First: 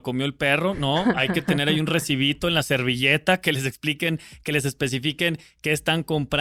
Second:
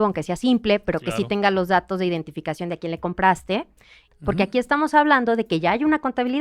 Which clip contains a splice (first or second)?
second